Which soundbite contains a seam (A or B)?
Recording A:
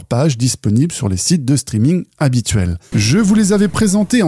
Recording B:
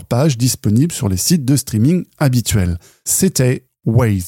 A